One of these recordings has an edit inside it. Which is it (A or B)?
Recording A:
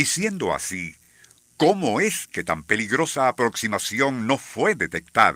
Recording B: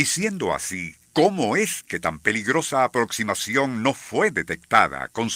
B